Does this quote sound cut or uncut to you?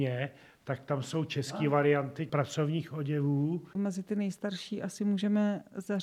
cut